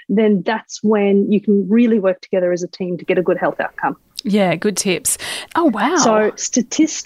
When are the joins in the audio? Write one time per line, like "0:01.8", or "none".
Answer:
0:05.5